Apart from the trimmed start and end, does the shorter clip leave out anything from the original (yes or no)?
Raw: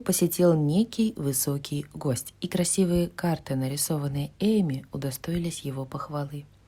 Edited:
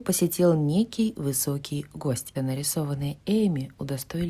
yes